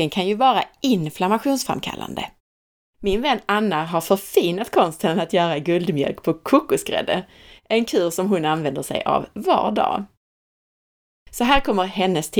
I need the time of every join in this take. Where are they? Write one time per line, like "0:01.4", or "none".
0:02.9